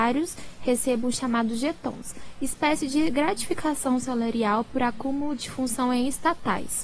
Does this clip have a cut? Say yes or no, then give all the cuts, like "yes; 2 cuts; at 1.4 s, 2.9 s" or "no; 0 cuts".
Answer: no; 0 cuts